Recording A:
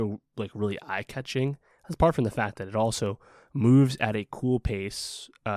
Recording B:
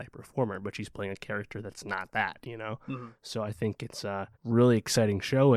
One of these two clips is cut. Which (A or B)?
B